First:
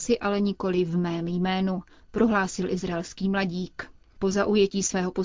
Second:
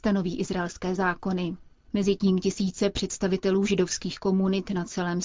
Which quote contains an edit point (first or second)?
second